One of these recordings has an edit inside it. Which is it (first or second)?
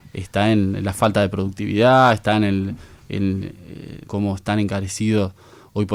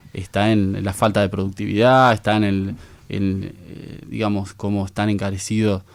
first